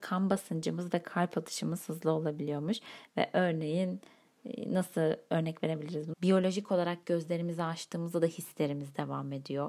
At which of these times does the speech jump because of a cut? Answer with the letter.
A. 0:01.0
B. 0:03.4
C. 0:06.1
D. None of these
C